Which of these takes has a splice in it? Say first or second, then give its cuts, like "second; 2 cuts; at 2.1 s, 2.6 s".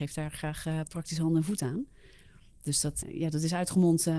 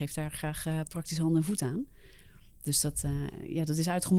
first; 1 cut; at 3.0 s